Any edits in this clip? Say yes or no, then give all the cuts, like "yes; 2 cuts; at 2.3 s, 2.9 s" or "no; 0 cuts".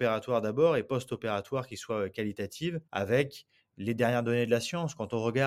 yes; 1 cut; at 2.9 s